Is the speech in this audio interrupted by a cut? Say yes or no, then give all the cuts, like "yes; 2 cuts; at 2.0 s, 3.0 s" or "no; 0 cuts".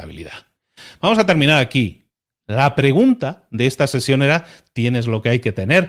no; 0 cuts